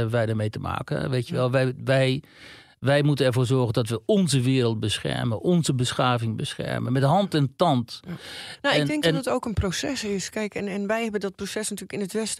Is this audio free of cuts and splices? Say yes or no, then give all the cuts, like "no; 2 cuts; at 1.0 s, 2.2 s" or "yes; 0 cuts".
yes; 0 cuts